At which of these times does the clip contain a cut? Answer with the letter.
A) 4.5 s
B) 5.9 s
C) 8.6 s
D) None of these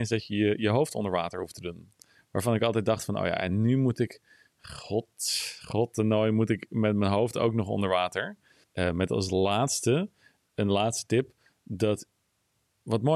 C